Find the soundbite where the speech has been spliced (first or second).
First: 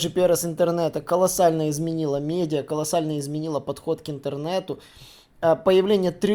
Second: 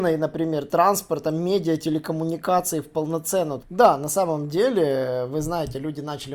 second